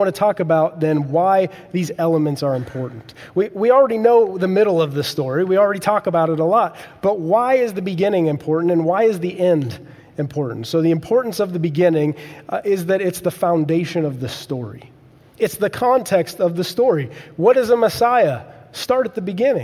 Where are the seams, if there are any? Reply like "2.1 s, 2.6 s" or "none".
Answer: none

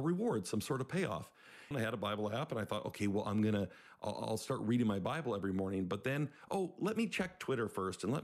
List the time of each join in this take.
1.7 s

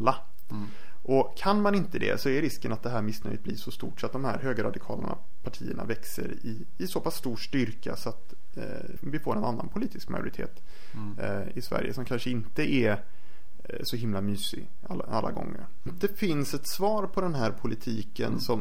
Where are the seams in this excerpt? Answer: 9.0 s, 15.9 s

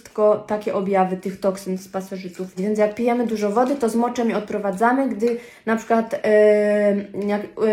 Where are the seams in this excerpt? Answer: 2.6 s

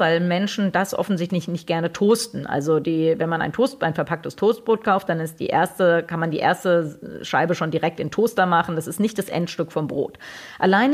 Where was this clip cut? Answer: none

